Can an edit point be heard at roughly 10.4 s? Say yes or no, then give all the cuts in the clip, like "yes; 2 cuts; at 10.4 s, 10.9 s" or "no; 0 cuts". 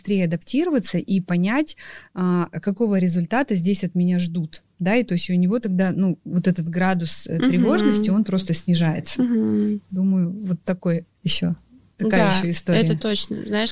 no; 0 cuts